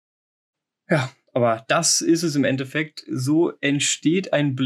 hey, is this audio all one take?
yes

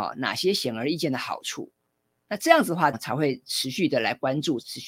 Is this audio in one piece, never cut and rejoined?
no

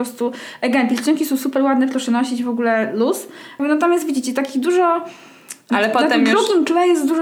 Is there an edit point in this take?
yes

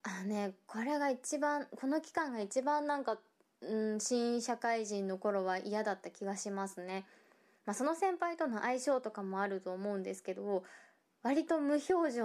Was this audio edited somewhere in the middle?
no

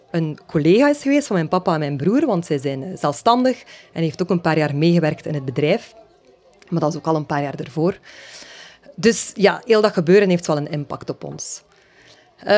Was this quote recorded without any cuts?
yes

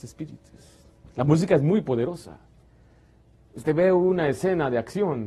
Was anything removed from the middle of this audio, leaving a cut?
no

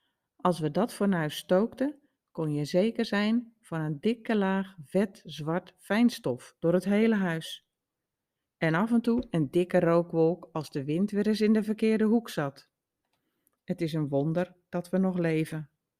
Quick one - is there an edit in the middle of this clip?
no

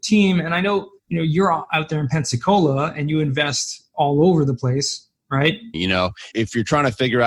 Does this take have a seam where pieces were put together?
yes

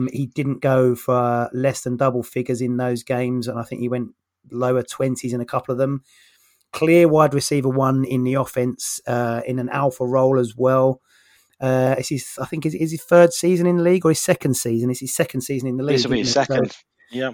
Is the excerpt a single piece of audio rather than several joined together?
yes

